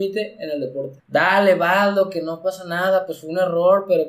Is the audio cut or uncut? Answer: cut